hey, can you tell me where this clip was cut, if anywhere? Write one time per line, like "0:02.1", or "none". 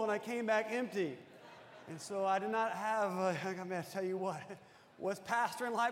none